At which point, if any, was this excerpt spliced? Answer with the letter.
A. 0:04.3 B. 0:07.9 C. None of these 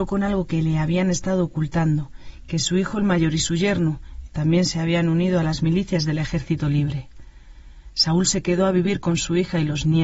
A